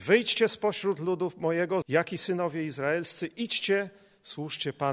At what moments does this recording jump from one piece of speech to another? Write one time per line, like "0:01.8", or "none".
0:01.8

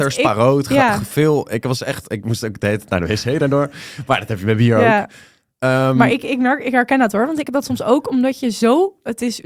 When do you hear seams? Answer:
none

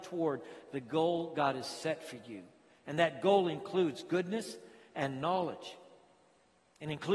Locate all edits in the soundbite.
none

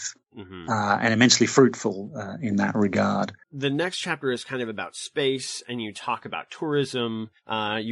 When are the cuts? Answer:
0:03.4

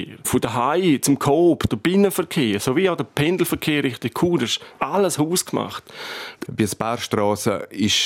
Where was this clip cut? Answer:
0:01.7
0:06.5

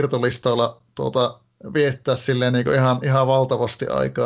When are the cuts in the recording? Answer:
none

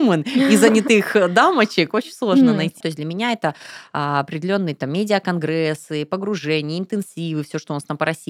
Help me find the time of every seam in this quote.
0:02.8

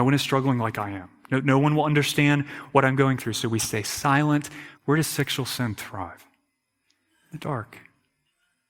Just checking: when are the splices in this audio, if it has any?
0:04.7

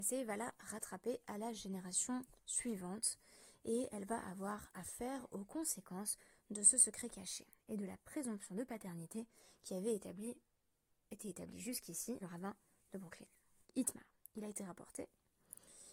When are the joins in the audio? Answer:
0:12.2
0:13.6

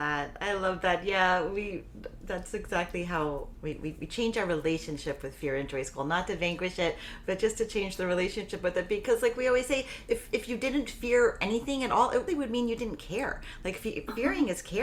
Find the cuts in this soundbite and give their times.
0:03.5
0:12.3

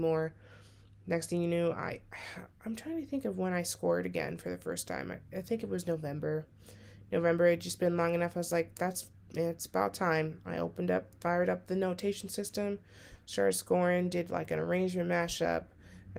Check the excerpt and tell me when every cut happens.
none

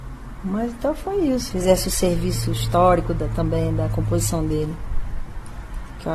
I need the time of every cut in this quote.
0:01.5

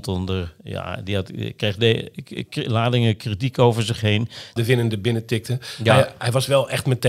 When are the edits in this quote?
0:04.6

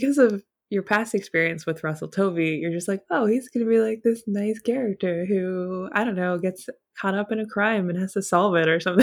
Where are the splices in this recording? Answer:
none

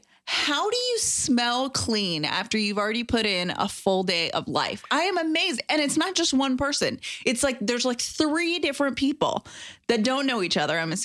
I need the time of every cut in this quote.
none

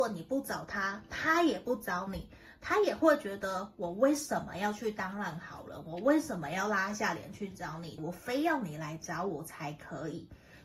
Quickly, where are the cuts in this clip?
0:08.0

